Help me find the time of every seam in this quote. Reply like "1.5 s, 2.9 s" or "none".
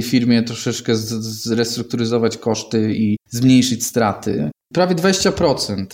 4.6 s